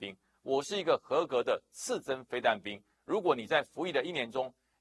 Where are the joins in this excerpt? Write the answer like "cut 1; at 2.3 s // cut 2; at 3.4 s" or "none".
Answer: none